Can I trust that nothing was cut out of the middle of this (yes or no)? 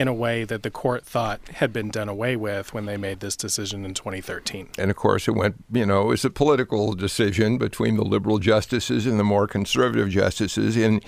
no